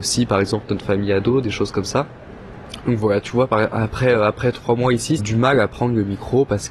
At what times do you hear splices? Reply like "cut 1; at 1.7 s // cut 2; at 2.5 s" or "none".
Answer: cut 1; at 2.8 s // cut 2; at 5.2 s